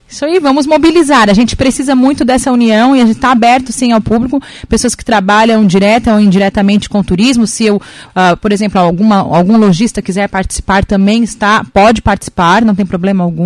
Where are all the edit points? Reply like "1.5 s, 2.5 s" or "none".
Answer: none